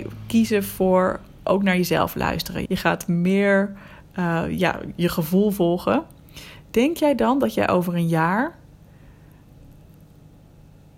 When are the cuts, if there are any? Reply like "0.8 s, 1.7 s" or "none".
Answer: 2.7 s